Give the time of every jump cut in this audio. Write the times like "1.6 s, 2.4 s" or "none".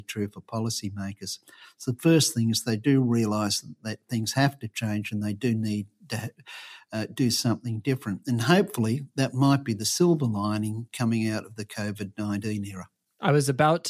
none